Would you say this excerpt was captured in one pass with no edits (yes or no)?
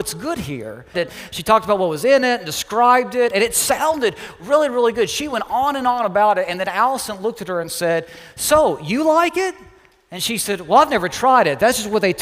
no